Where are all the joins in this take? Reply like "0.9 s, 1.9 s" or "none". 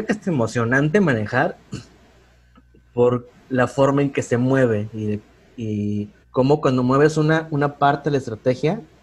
6.2 s